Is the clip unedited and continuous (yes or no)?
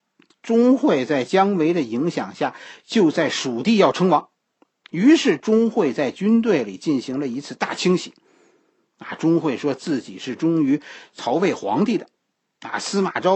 yes